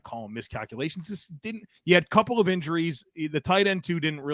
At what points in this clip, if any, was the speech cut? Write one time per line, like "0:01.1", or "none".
none